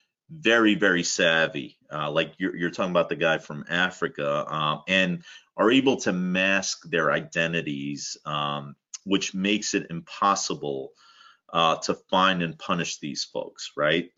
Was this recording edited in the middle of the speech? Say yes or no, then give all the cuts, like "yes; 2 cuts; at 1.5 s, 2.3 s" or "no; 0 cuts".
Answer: no; 0 cuts